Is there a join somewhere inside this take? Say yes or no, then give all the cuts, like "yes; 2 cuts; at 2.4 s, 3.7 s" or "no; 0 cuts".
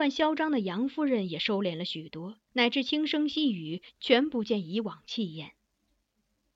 yes; 1 cut; at 2.5 s